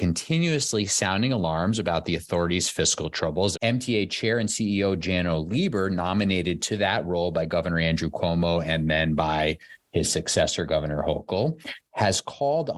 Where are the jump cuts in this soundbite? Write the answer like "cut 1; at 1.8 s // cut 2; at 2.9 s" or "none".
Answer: cut 1; at 3.5 s